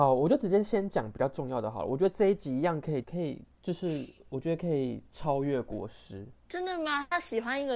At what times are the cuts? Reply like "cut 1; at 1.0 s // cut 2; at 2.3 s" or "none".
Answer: cut 1; at 3.0 s // cut 2; at 6.4 s